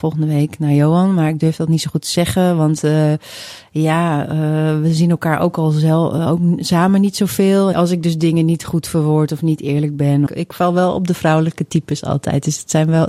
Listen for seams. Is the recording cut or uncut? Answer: cut